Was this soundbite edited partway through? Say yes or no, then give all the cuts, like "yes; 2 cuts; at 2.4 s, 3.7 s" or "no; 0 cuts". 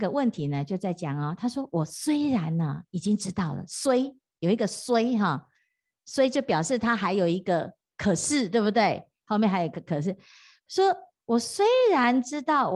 no; 0 cuts